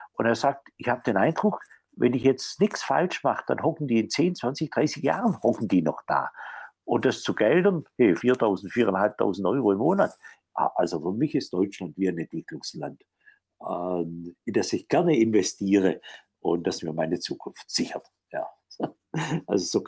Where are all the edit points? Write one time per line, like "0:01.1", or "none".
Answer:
0:08.2